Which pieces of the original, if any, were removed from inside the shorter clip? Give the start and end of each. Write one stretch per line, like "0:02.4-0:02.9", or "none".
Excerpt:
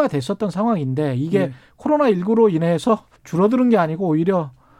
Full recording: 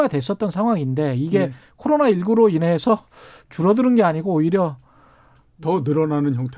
0:03.2-0:03.4